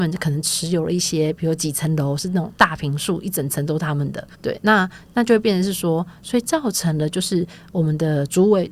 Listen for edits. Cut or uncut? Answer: cut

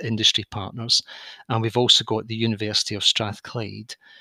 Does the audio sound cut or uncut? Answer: uncut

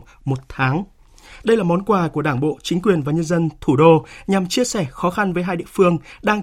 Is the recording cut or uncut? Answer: cut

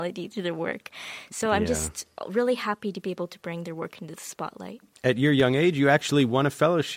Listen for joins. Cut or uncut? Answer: uncut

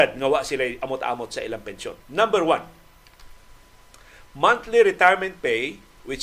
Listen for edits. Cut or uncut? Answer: cut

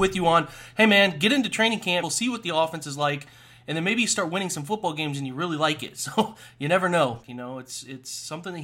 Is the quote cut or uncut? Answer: cut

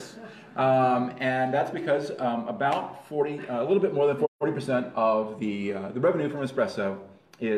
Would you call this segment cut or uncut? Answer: uncut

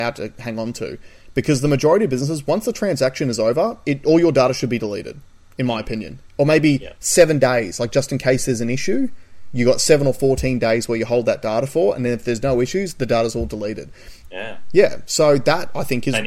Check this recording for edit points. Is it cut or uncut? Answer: cut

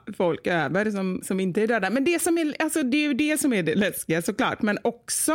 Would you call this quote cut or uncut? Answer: uncut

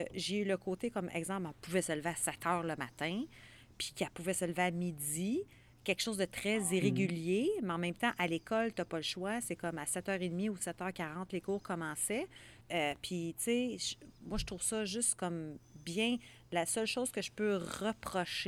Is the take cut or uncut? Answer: cut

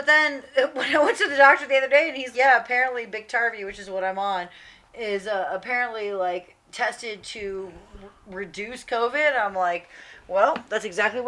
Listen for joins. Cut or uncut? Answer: cut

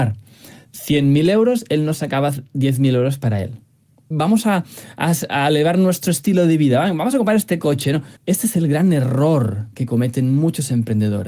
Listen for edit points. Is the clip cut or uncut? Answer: cut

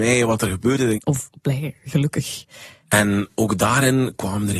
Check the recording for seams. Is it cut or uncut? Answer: cut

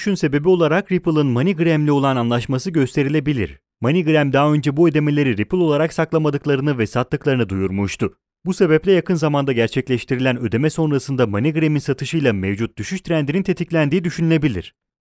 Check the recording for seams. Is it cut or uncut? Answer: cut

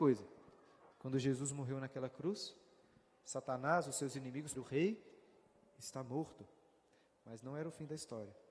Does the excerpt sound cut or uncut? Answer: cut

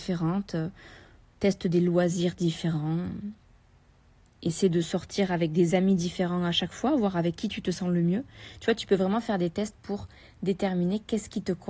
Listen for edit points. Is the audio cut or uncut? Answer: uncut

